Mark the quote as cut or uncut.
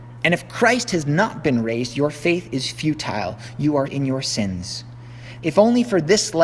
cut